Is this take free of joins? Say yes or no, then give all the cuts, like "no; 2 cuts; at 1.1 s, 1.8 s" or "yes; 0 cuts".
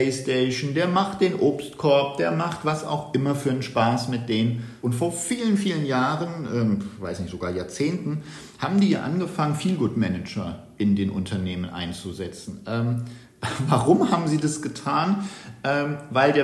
no; 1 cut; at 4.8 s